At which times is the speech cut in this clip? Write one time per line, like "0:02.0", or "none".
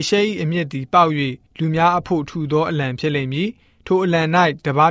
none